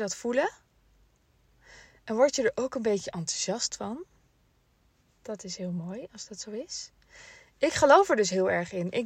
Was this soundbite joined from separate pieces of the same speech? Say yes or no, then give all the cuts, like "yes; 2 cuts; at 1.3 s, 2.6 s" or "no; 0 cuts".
no; 0 cuts